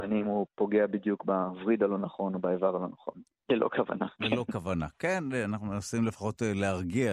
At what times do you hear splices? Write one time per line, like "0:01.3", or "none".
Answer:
0:03.4